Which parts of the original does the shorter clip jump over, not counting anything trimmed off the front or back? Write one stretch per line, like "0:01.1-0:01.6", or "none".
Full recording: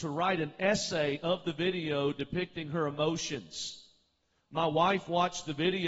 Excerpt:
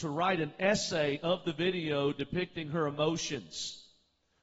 none